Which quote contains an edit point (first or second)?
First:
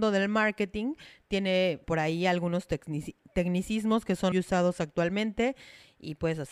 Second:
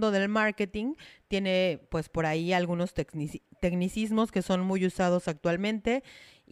first